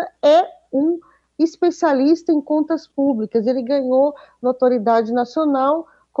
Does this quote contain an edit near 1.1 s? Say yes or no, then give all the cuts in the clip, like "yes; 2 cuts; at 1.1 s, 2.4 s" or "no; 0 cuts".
no; 0 cuts